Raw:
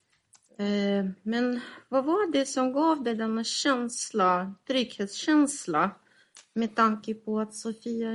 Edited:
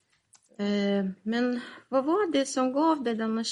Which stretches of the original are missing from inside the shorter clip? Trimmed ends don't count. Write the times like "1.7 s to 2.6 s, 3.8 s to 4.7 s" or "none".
none